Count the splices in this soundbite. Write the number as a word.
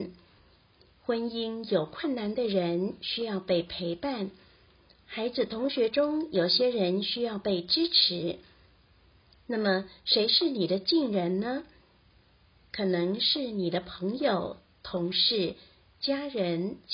zero